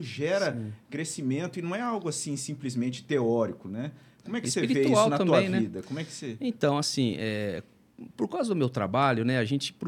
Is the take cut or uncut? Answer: uncut